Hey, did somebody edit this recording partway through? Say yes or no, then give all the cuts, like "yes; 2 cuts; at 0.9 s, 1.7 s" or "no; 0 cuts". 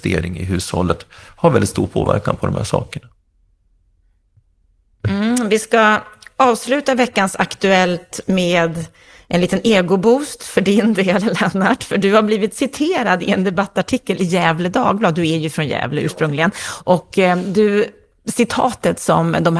no; 0 cuts